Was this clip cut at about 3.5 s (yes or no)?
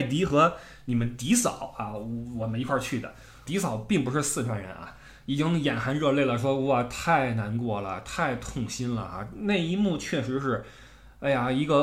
yes